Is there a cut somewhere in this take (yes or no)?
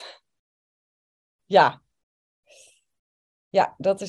no